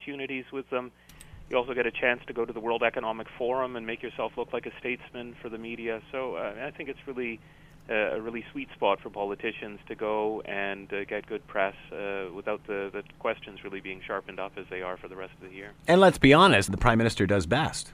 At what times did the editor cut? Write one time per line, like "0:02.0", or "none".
0:16.7